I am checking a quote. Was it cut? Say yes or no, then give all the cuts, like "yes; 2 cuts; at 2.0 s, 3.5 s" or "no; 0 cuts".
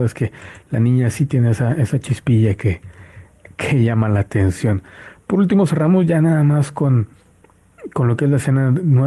no; 0 cuts